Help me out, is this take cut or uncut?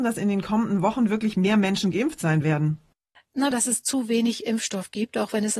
cut